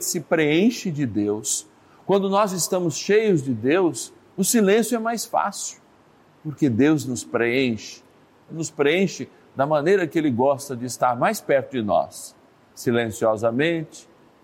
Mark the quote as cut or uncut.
cut